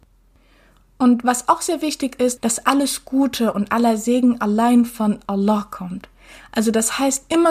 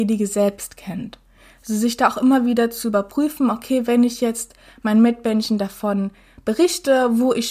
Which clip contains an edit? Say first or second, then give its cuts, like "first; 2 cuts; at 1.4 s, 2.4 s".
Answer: first; 1 cut; at 2.4 s